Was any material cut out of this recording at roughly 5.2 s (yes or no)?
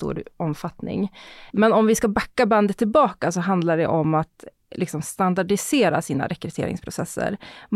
no